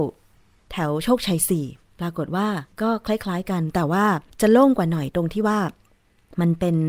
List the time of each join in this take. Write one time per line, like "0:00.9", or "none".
0:02.7
0:04.3